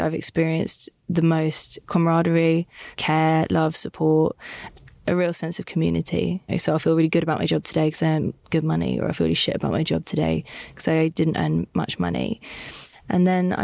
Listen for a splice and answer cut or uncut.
cut